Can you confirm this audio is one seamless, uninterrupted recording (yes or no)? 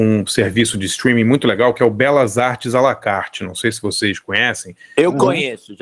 yes